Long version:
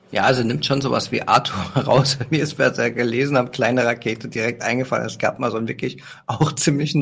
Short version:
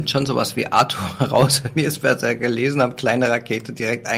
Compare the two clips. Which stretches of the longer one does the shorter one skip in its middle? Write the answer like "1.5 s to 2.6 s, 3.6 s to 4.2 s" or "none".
none